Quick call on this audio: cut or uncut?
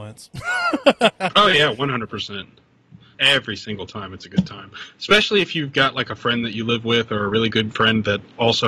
cut